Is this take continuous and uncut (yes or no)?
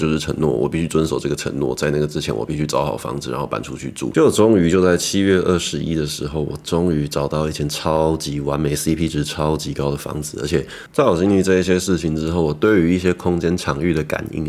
yes